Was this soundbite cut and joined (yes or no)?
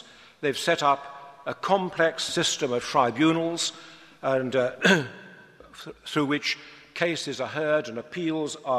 no